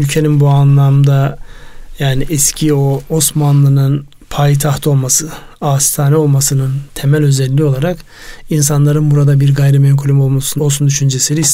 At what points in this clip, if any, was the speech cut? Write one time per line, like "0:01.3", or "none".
0:10.6